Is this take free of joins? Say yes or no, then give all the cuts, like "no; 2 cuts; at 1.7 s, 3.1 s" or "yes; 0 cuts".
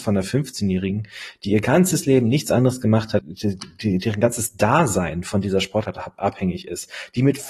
no; 1 cut; at 3.2 s